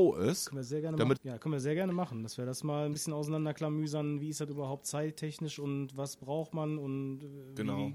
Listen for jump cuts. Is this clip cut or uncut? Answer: cut